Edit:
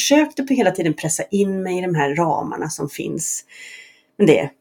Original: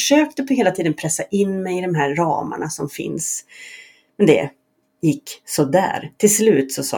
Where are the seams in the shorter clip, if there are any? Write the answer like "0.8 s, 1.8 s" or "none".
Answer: none